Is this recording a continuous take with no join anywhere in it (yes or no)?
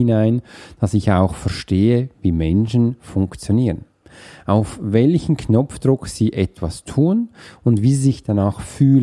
yes